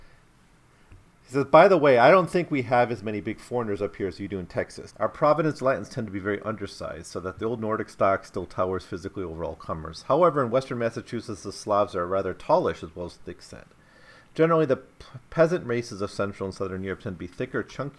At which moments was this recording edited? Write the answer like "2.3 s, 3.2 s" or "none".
4.9 s